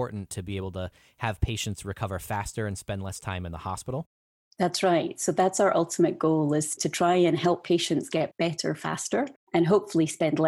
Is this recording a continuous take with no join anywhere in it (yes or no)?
yes